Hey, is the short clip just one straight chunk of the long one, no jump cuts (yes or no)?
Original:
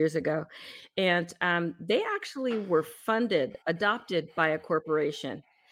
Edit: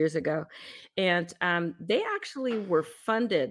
yes